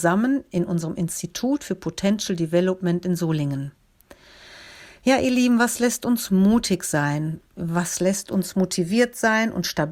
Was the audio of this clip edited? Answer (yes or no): no